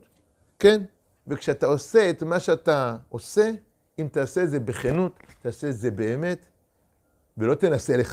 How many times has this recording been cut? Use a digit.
1